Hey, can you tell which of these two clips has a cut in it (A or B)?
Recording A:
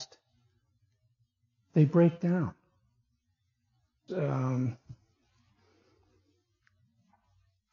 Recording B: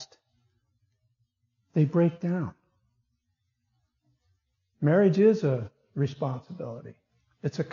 A